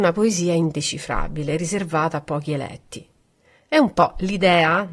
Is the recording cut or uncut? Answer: uncut